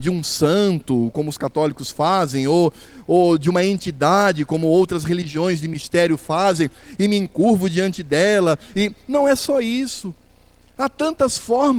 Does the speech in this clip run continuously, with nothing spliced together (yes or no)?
yes